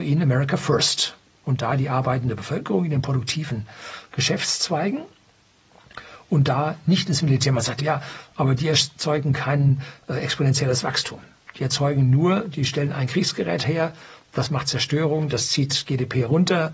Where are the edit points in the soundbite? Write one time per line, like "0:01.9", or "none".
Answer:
0:07.8